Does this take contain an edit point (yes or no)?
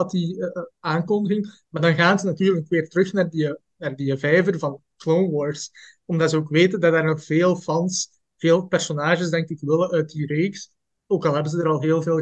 no